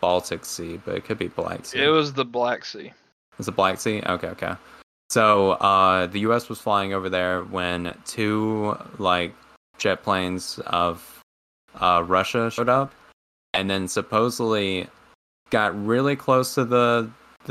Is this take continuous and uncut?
yes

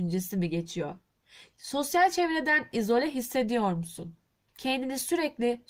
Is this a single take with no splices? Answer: no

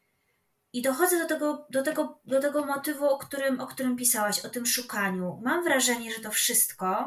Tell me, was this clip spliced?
no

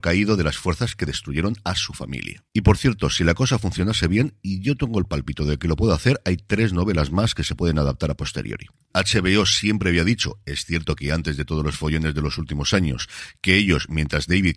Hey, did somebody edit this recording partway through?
yes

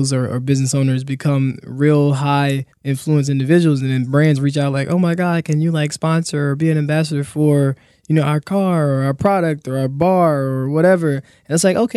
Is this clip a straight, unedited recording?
no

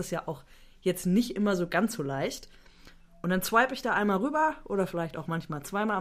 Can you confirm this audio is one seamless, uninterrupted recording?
yes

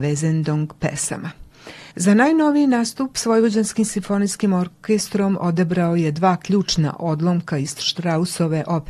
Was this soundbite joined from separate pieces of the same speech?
yes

